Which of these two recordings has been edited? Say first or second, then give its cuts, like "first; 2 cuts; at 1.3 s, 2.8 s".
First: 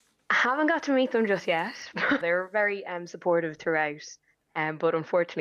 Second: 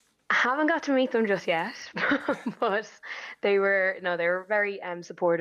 first; 1 cut; at 2.2 s